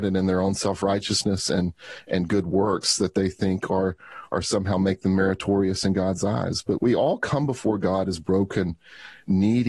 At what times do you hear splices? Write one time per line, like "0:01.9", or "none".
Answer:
0:06.8